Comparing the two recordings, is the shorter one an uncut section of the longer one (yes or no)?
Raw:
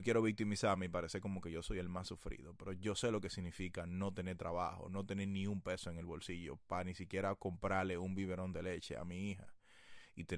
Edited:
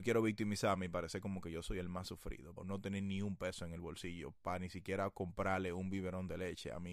no